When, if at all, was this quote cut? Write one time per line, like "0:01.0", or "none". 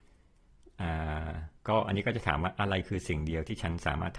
0:01.6